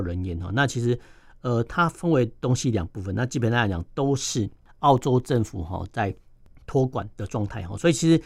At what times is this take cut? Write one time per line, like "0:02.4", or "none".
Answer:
none

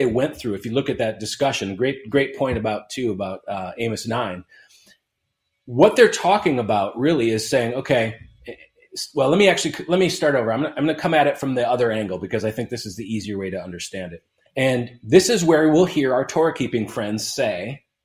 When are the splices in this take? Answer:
0:14.5

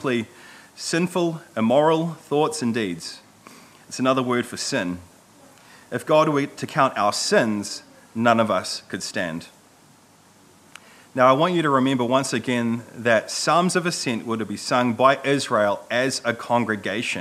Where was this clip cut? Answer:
none

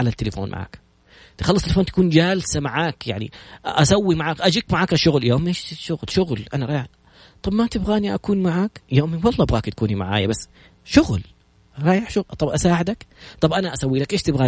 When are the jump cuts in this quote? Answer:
none

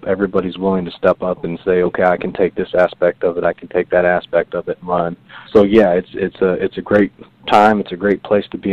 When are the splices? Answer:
0:05.5

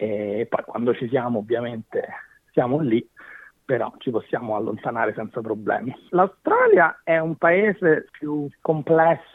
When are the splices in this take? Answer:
0:06.1
0:08.1

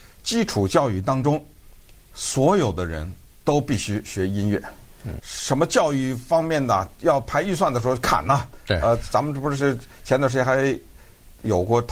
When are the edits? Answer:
0:05.2

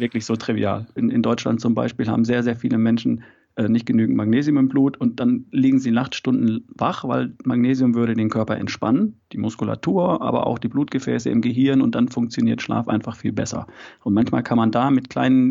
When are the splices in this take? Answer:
0:01.0

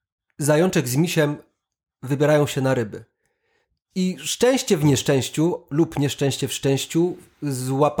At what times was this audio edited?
none

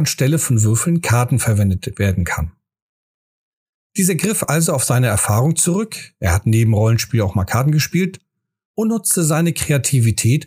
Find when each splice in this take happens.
none

